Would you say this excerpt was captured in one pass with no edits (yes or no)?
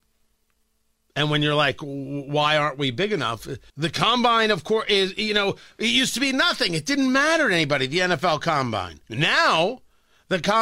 no